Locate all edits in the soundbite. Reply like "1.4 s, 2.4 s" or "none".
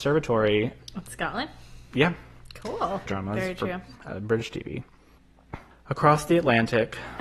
3.1 s, 5.7 s